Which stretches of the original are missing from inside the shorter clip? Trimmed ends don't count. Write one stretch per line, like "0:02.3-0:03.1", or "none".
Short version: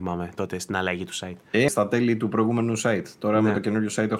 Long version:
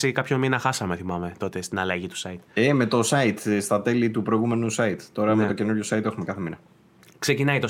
0:02.7-0:03.6